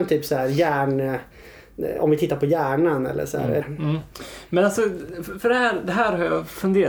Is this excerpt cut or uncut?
cut